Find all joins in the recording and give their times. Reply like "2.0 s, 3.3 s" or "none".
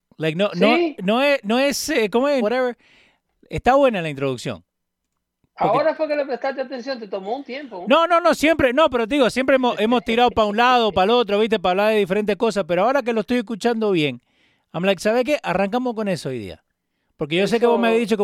2.4 s